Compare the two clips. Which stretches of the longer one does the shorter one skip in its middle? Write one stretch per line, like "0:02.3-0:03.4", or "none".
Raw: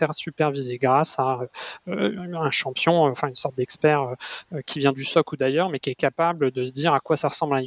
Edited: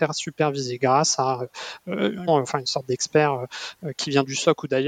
0:02.3-0:03.0